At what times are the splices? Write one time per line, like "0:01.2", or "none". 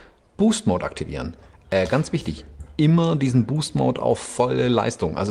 none